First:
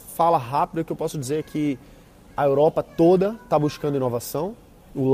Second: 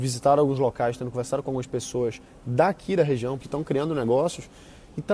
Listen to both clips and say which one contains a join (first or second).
second